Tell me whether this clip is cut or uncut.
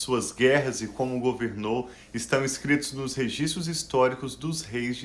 uncut